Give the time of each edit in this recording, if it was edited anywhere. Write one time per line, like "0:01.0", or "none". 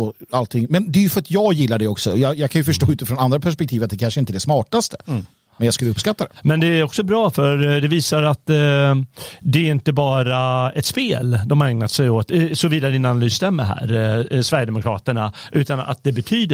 none